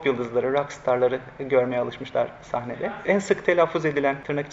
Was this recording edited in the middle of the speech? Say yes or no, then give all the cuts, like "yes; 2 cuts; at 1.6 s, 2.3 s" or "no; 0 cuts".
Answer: no; 0 cuts